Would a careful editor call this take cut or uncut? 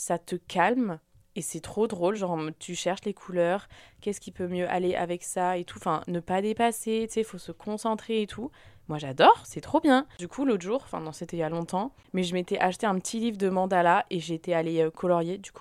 uncut